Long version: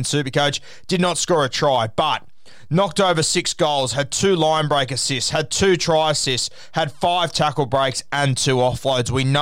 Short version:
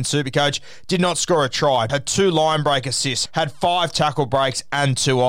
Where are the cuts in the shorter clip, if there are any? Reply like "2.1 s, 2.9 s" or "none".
1.9 s, 3.3 s